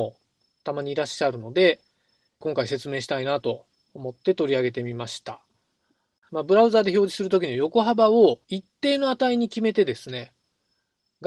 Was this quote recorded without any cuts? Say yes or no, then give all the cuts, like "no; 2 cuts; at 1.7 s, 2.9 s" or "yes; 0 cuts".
no; 2 cuts; at 6.3 s, 8.4 s